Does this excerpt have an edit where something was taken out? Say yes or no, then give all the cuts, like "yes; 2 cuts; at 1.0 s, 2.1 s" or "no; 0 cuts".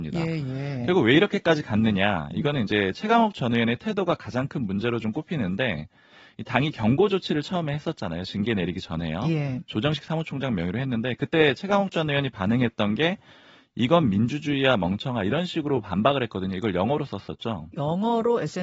yes; 1 cut; at 17.7 s